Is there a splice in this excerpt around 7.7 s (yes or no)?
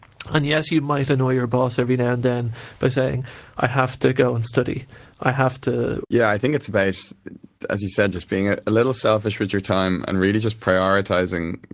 no